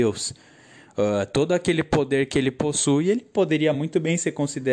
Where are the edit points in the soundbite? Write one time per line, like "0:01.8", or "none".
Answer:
none